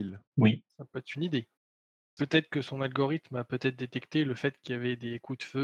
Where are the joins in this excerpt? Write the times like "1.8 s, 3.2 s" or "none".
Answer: 2.2 s